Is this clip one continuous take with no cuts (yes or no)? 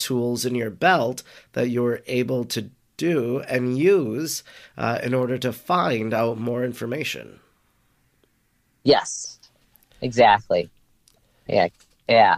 yes